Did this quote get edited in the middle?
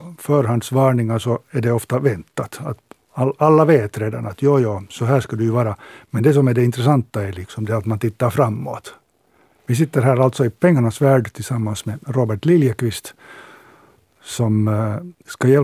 no; 0 cuts

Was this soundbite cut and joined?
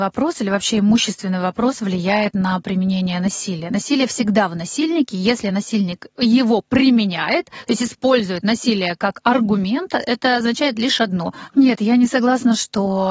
yes; 1 cut; at 11.5 s

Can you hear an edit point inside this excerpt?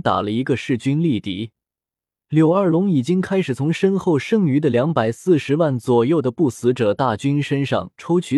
yes; 1 cut; at 2.2 s

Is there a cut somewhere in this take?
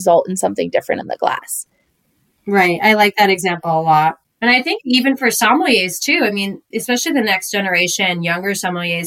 no; 0 cuts

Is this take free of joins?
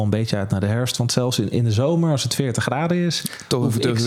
yes; 0 cuts

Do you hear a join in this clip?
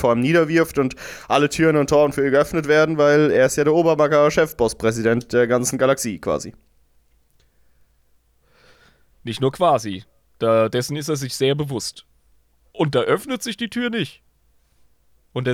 no; 0 cuts

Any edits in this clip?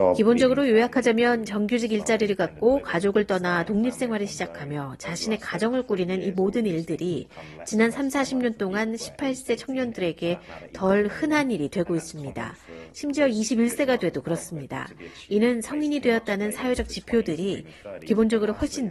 no; 0 cuts

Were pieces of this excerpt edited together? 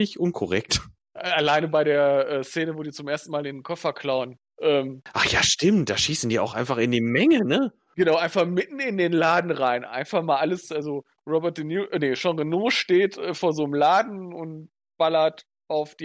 no; 0 cuts

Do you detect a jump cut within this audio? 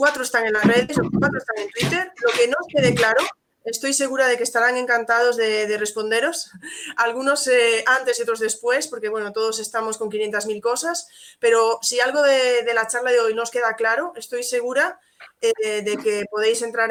no; 0 cuts

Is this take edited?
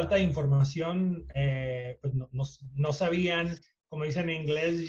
no; 0 cuts

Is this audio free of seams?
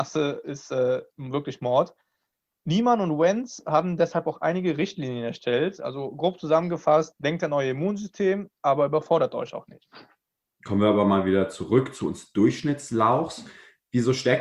yes; 0 cuts

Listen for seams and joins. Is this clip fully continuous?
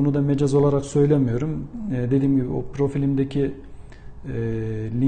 yes; 0 cuts

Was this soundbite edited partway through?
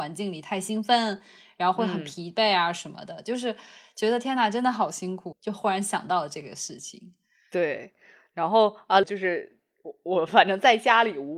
yes; 2 cuts; at 5.3 s, 9.0 s

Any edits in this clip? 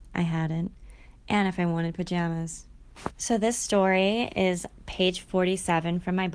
yes; 1 cut; at 3.1 s

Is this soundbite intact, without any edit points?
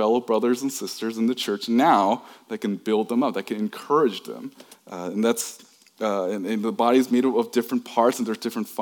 no; 1 cut; at 4.7 s

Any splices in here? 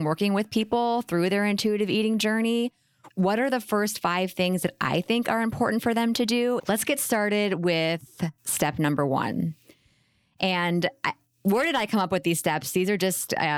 yes; 2 cuts; at 3.1 s, 6.6 s

